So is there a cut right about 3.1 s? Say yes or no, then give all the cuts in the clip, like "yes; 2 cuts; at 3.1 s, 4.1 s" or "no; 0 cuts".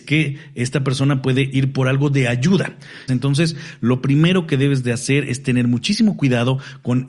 yes; 1 cut; at 3.1 s